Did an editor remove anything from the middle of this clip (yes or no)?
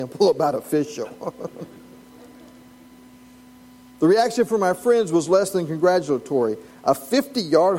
no